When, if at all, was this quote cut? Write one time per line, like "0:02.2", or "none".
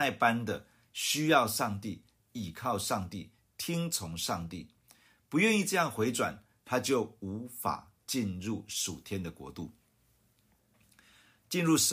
none

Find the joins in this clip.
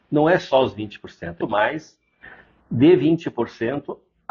0:01.4

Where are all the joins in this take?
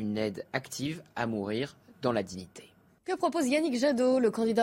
none

